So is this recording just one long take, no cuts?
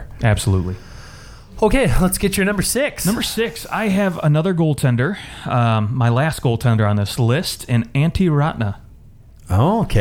yes; 0 cuts

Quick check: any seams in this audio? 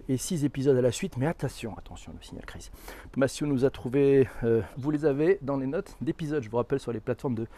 yes; 3 cuts; at 1.8 s, 3.1 s, 4.7 s

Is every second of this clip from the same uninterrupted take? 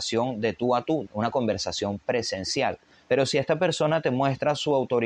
no; 2 cuts; at 1.1 s, 3.0 s

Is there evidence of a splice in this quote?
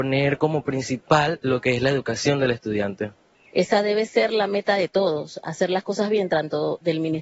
no; 0 cuts

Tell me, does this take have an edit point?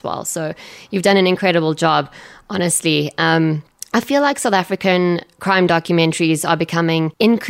no; 0 cuts

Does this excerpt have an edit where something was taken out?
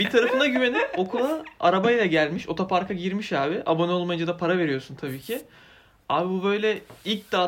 no; 0 cuts

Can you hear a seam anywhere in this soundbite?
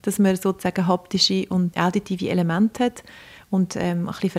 yes; 1 cut; at 1.7 s

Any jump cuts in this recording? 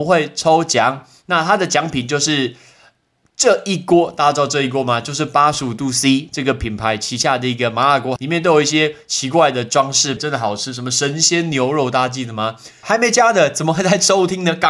yes; 3 cuts; at 8.2 s, 10.2 s, 12.8 s

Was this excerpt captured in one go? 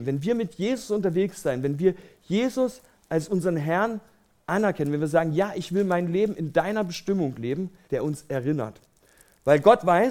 no; 1 cut; at 7.9 s

